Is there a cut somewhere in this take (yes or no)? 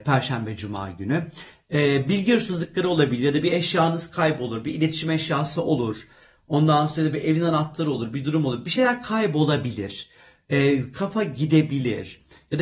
no